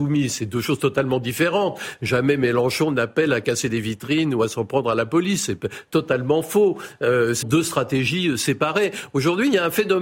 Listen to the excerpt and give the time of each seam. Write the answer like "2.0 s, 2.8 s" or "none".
7.4 s